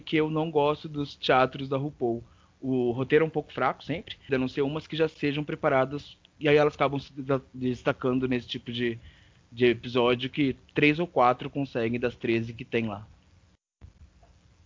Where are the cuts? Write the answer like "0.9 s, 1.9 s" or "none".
4.3 s